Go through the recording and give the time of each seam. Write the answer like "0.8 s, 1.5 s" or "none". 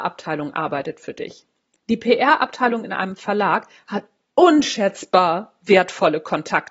none